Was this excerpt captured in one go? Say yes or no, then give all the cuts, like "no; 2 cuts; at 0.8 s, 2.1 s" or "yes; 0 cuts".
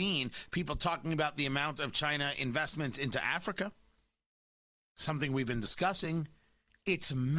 yes; 0 cuts